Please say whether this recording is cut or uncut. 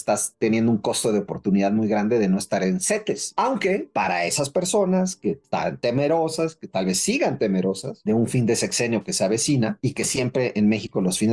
uncut